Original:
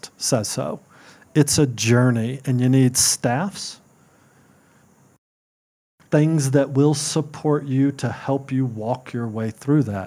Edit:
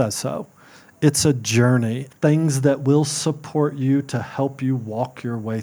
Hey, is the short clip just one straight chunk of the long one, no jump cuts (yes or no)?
no